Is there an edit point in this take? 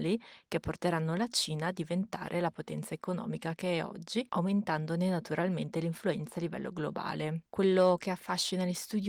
no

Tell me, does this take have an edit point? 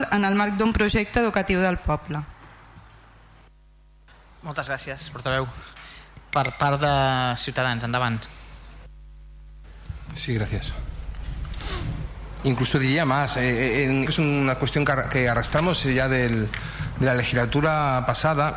yes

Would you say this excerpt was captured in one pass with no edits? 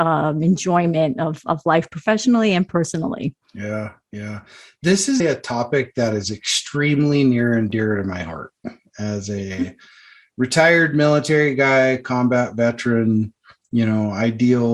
no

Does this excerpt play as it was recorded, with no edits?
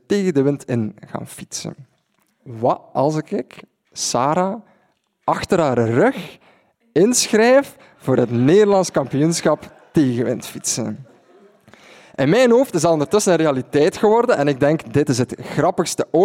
no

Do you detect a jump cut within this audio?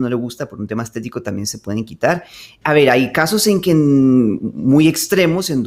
yes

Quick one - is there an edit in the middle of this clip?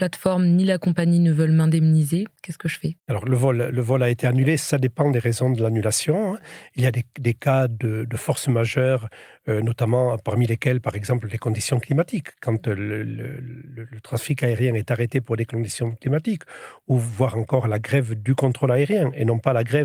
no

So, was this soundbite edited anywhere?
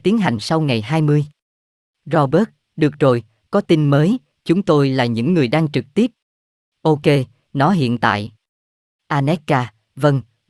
no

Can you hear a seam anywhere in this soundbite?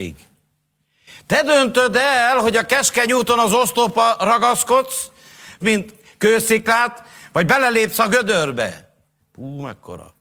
yes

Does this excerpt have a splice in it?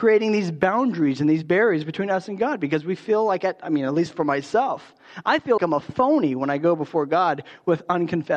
yes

